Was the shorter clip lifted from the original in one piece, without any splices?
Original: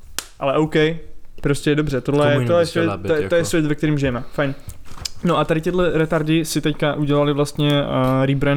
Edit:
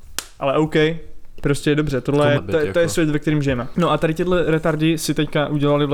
no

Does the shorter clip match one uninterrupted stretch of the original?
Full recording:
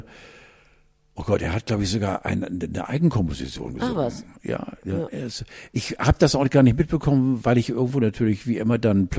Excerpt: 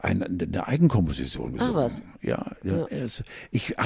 yes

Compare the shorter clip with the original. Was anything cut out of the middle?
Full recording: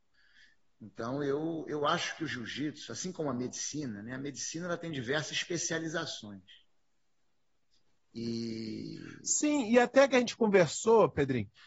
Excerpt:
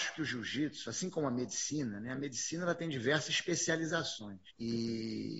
yes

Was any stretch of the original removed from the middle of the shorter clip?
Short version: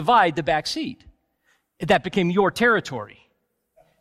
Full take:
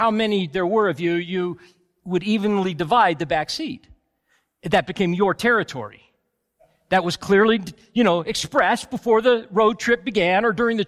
no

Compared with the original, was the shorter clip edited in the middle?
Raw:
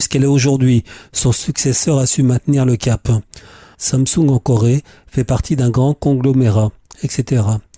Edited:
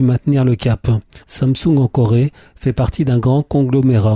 yes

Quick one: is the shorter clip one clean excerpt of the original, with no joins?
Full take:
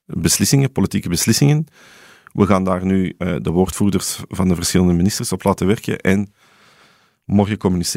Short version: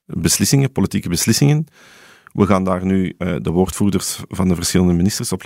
yes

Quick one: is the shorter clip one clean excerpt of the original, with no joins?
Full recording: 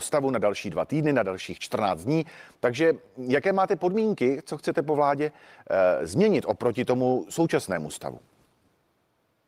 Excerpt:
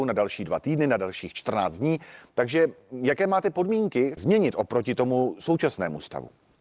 no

